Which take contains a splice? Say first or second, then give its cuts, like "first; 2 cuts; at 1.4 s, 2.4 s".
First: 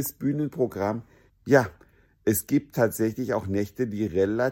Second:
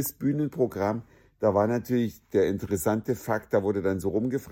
first; 1 cut; at 1.3 s